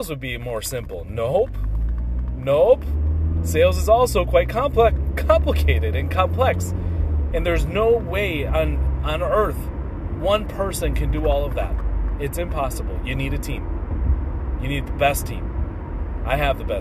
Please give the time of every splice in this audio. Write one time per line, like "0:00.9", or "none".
0:07.3